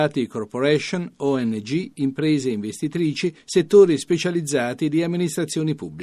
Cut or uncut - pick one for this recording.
uncut